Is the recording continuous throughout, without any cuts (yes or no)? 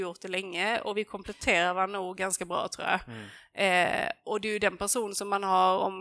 yes